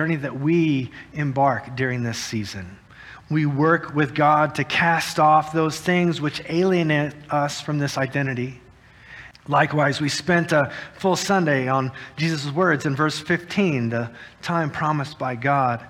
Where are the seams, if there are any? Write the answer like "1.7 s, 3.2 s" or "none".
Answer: 3.2 s, 9.3 s